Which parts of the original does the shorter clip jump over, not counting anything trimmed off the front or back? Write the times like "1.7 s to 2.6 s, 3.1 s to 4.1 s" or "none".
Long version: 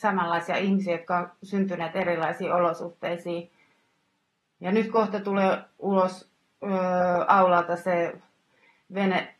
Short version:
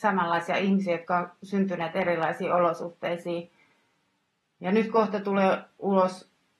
none